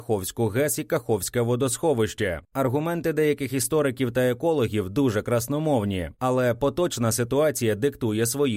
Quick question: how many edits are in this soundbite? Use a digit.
0